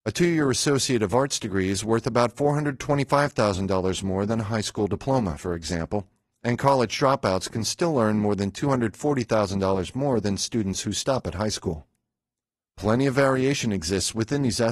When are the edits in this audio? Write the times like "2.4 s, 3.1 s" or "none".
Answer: none